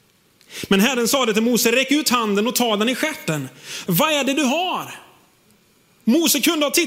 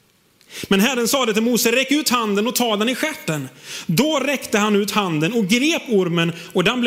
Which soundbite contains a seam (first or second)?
first